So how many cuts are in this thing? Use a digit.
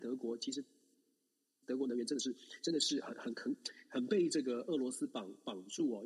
0